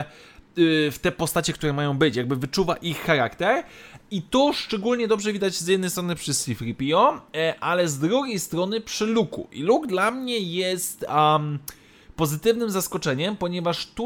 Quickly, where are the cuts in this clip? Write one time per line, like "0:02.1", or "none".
none